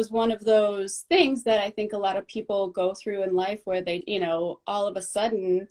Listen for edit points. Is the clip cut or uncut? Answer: cut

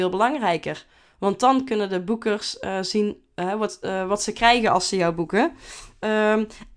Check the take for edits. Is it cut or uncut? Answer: uncut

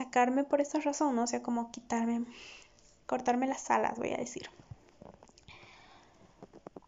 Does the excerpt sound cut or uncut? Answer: uncut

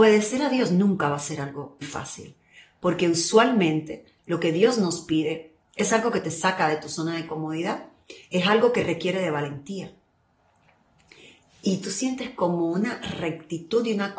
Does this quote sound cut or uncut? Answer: cut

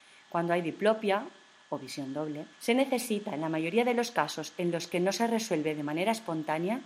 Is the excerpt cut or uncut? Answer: cut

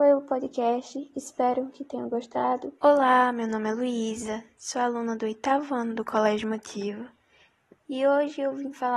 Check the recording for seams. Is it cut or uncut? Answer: cut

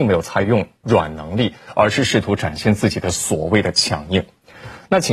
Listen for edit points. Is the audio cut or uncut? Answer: uncut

